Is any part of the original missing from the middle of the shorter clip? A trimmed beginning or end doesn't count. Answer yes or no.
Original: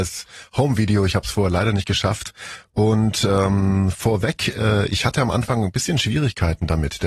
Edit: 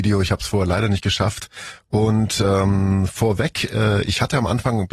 no